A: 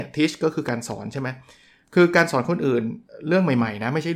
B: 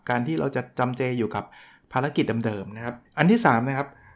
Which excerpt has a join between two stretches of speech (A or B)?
B